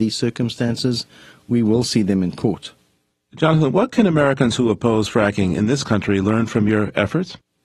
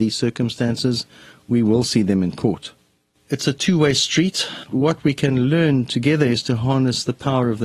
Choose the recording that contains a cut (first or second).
second